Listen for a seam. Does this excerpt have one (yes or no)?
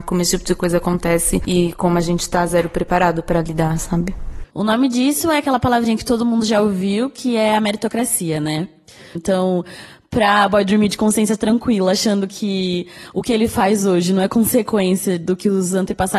yes